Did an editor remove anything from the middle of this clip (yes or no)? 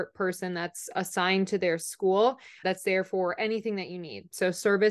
yes